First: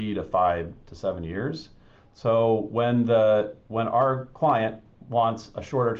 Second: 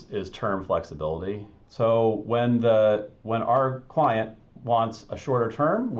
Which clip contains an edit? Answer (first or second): second